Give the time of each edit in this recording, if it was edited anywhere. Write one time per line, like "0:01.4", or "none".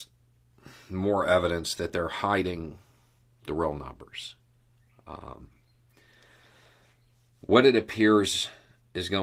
none